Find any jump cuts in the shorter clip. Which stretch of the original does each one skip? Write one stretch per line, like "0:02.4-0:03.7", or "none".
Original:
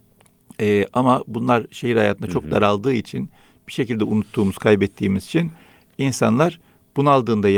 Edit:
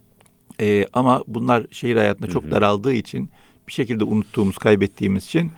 none